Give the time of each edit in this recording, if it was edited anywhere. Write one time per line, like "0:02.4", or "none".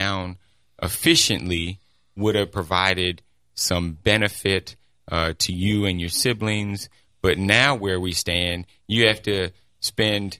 none